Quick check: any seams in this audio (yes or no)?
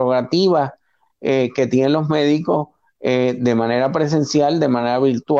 no